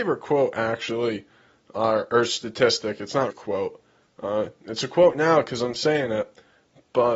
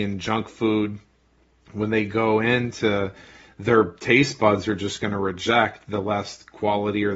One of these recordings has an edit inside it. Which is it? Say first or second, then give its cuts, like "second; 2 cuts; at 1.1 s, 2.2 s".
first; 1 cut; at 3.3 s